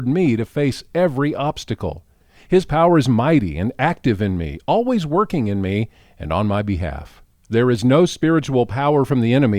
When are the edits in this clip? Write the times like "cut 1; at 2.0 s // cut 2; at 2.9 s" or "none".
none

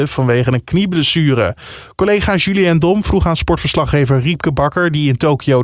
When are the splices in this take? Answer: none

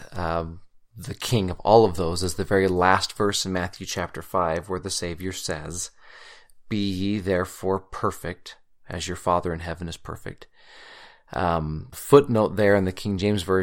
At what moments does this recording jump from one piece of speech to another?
cut 1; at 11.9 s

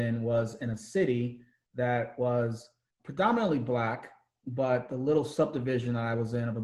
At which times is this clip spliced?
cut 1; at 3.0 s

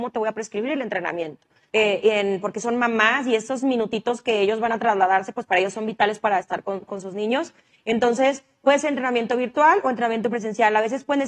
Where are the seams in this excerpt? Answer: cut 1; at 1.7 s

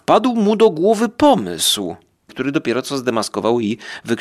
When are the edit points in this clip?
cut 1; at 2.3 s

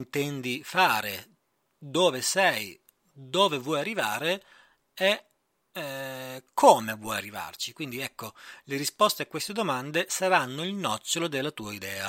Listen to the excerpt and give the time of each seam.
none

